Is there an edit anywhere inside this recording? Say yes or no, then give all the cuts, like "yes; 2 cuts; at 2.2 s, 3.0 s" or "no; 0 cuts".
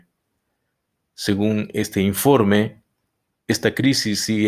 no; 0 cuts